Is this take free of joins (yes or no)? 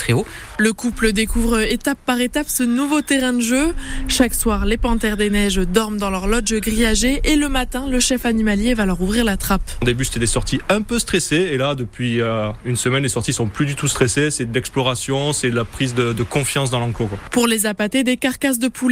yes